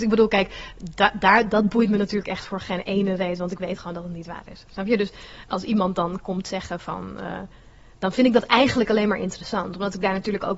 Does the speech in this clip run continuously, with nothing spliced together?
yes; 0 cuts

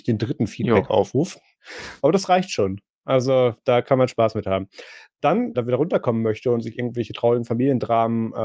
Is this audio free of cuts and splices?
no; 2 cuts; at 1.6 s, 5.5 s

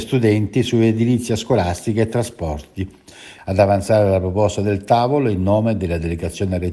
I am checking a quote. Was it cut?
yes; 1 cut; at 3.4 s

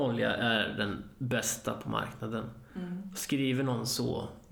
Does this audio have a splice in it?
no; 0 cuts

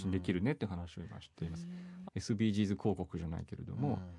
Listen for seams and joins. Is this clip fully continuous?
no; 1 cut; at 2.0 s

